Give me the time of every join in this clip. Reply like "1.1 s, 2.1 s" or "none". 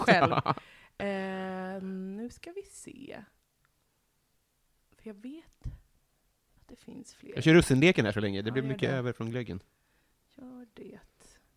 none